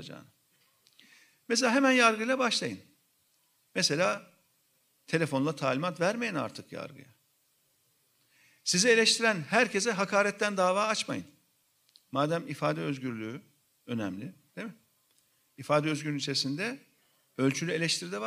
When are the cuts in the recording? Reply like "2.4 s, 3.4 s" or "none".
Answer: none